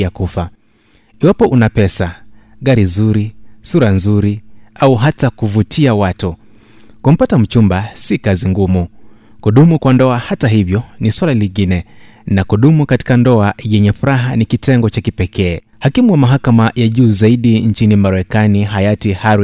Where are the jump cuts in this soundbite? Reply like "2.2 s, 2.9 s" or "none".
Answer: 15.7 s